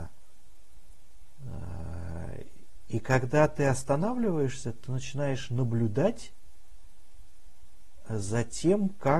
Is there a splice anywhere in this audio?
yes; 1 cut; at 2.9 s

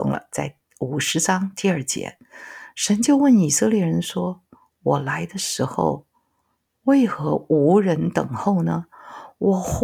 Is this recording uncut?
yes; 0 cuts

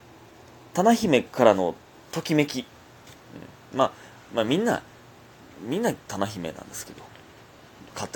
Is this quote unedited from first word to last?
yes; 0 cuts

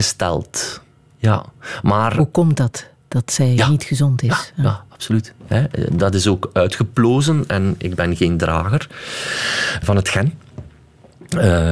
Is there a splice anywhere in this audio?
yes; 2 cuts; at 5.4 s, 9.8 s

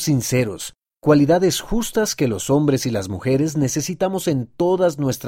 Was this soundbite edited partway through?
no; 0 cuts

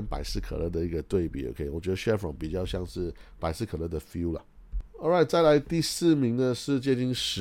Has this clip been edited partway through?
no; 0 cuts

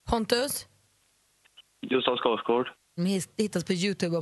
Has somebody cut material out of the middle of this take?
yes; 1 cut; at 3.0 s

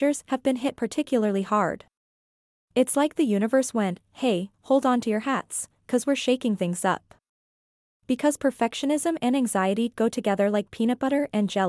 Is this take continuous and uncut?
no; 1 cut; at 4.5 s

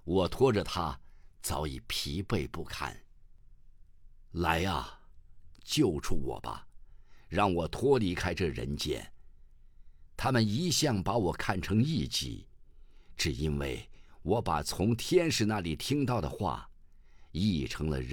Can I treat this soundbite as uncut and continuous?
no; 1 cut; at 5.5 s

